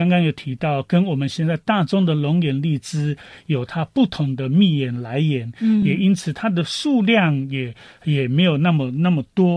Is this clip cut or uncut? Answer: uncut